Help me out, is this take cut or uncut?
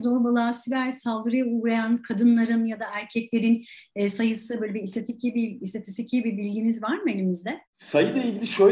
cut